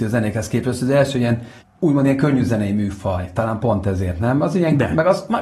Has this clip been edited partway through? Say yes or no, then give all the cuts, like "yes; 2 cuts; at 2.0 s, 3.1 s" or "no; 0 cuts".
no; 0 cuts